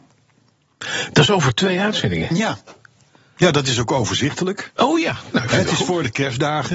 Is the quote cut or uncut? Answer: uncut